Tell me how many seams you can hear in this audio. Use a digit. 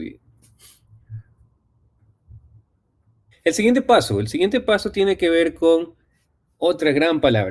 1